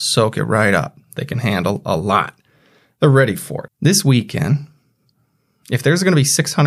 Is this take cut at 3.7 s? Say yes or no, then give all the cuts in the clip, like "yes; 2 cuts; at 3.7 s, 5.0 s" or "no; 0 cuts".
yes; 1 cut; at 3.7 s